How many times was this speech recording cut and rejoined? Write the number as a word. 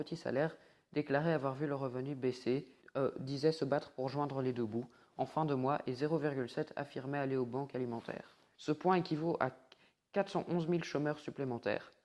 two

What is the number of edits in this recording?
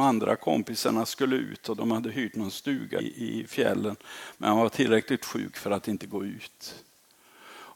two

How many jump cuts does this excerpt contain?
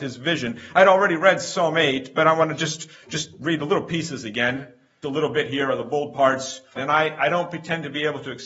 two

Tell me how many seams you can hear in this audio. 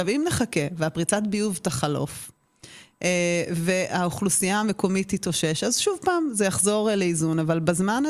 zero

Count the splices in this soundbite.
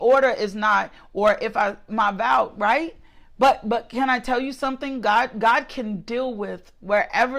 zero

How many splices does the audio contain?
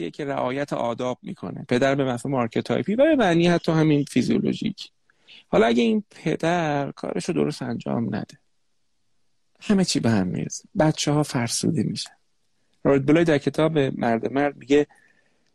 zero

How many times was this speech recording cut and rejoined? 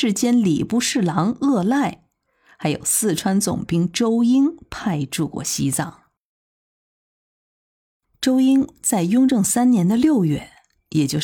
zero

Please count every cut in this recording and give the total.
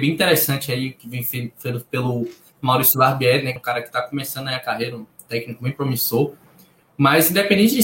one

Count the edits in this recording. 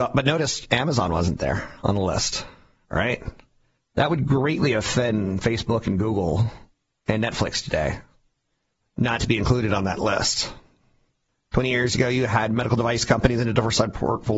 one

